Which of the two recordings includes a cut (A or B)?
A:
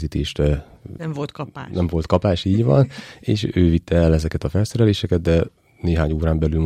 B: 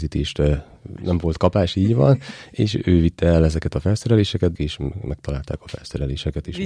B